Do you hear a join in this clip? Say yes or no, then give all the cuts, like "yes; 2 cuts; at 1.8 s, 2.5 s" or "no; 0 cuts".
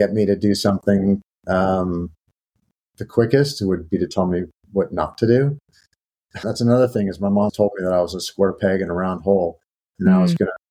yes; 2 cuts; at 6.4 s, 7.5 s